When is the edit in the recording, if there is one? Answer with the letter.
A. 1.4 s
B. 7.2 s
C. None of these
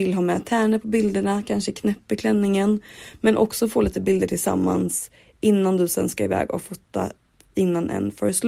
A